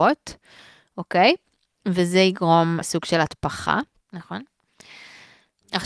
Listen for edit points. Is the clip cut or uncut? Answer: cut